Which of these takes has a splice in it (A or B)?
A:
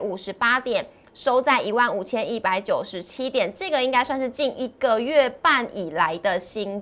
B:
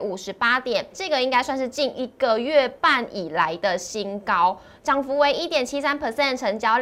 B